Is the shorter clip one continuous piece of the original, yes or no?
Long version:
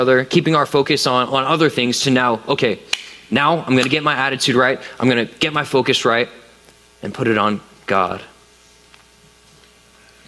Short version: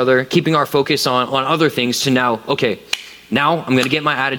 yes